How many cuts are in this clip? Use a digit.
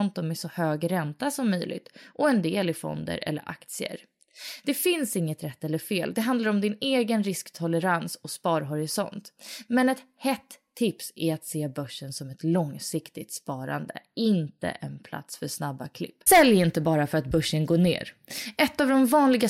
1